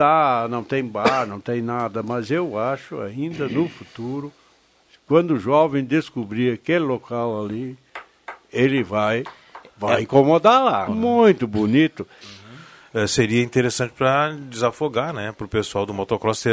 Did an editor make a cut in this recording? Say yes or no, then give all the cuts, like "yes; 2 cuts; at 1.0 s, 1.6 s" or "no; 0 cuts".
yes; 2 cuts; at 10.9 s, 12.2 s